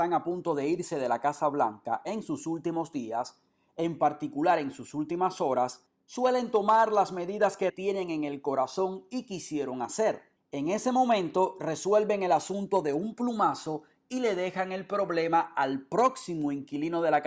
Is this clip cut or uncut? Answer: cut